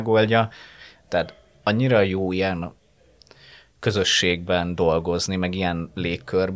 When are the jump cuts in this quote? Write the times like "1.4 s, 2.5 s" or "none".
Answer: 1.0 s